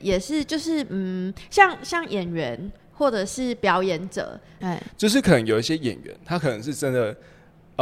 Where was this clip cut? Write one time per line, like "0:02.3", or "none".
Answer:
0:04.6